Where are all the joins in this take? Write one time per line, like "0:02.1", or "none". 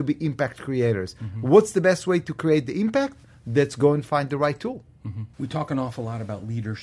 0:05.3